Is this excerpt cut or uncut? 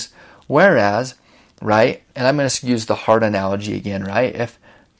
cut